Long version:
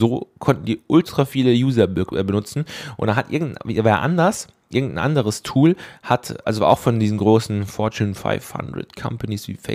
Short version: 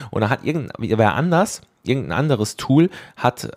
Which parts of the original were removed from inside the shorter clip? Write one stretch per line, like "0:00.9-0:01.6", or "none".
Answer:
none